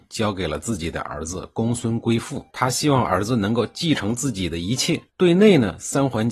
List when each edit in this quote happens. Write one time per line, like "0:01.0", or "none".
0:02.5
0:05.1